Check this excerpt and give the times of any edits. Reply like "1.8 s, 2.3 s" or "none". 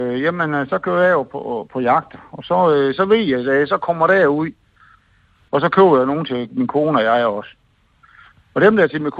5.5 s